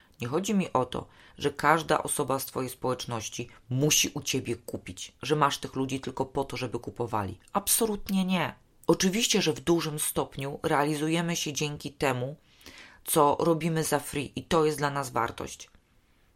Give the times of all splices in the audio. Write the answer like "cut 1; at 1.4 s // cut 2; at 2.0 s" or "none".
cut 1; at 8.9 s